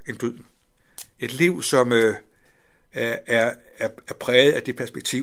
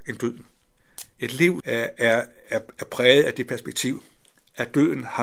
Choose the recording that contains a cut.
second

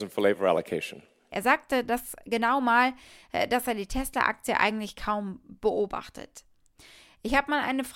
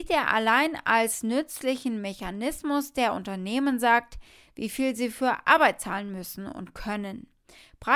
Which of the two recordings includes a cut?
first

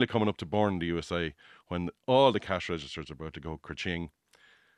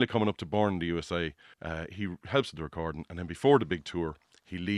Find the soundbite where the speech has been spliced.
second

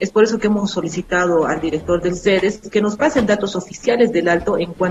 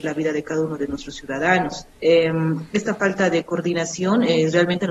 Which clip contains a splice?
second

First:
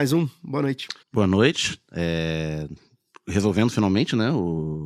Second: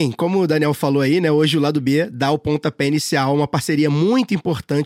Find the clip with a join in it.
first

